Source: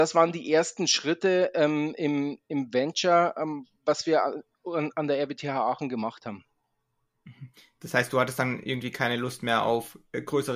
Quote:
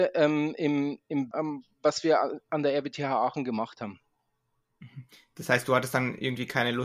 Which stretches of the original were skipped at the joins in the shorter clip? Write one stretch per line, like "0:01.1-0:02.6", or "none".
0:02.7-0:03.3
0:04.5-0:04.9